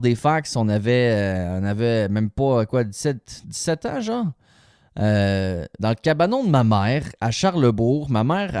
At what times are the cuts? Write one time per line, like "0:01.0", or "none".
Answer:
0:05.8